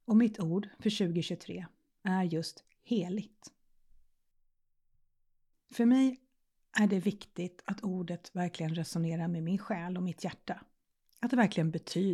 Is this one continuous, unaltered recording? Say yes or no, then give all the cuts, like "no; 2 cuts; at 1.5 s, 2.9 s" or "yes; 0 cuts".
yes; 0 cuts